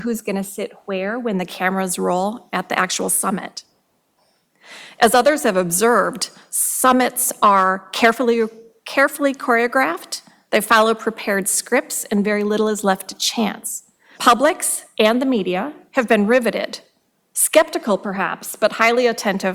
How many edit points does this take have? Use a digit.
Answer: 1